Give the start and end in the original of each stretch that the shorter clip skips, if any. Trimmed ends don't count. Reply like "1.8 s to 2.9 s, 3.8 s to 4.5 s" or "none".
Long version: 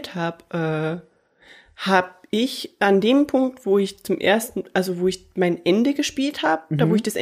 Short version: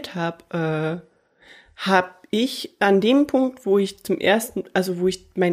none